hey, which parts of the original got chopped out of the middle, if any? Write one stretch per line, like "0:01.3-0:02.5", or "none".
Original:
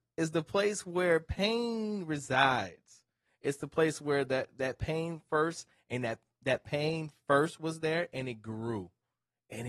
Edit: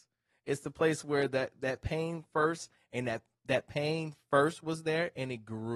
none